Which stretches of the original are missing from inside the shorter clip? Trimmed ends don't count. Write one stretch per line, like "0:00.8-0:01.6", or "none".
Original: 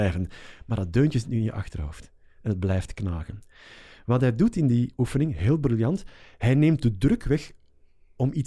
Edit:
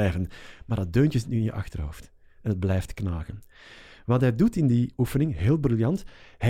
none